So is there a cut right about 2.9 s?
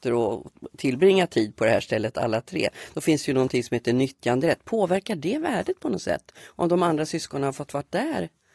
no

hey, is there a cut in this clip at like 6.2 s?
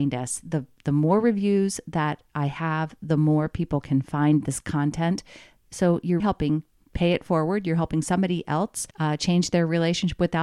yes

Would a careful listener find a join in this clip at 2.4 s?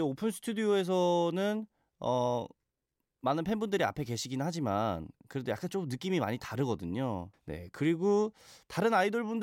no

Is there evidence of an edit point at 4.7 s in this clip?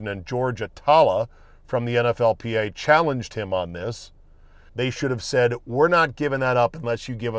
yes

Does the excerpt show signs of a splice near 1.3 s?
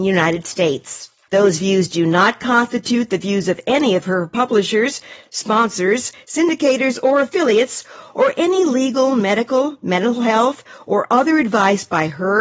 yes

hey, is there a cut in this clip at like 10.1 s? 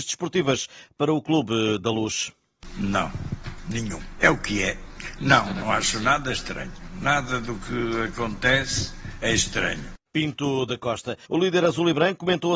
yes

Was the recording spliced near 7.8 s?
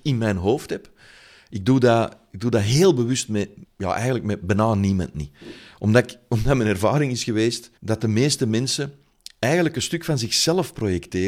yes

